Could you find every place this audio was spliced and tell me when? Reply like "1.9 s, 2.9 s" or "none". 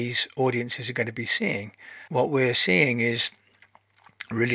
2.1 s